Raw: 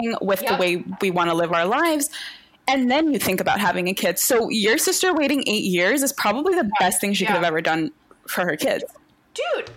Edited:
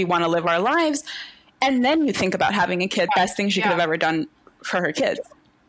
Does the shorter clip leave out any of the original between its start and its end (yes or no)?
yes